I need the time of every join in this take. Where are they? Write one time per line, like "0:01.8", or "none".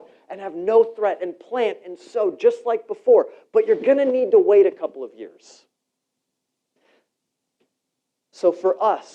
none